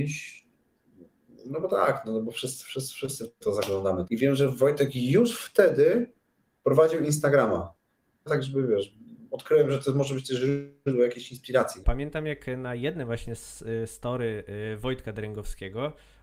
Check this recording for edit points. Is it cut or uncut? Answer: cut